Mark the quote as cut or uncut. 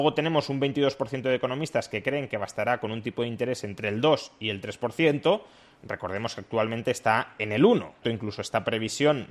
cut